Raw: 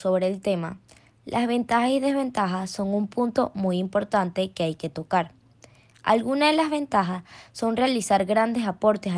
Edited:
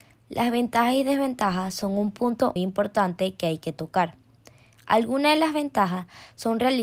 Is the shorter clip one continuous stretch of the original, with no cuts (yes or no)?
no